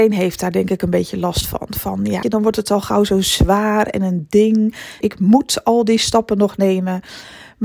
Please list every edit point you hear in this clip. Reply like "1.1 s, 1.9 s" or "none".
2.2 s, 5.0 s